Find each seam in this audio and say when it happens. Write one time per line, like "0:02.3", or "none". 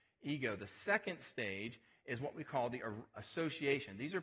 0:03.1

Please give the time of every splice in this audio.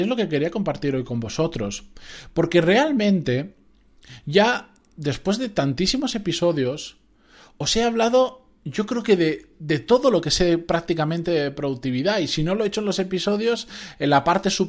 none

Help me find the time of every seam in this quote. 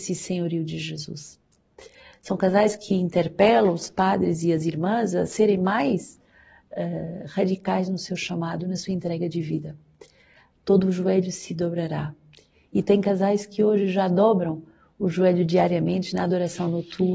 none

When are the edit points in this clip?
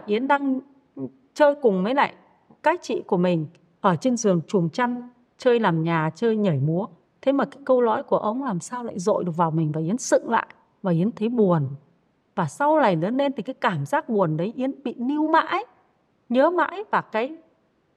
none

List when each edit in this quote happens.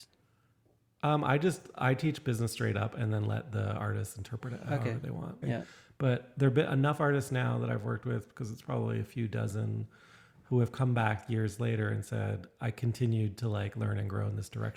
0:05.4

